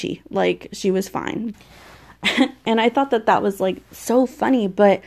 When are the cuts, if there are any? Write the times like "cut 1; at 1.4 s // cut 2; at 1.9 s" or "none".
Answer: cut 1; at 1.5 s